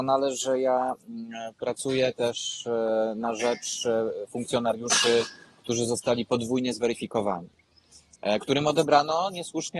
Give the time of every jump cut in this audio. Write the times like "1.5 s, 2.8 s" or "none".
none